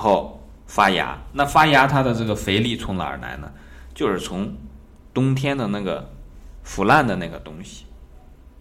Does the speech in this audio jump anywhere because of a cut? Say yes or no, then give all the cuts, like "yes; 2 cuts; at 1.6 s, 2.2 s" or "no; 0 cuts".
no; 0 cuts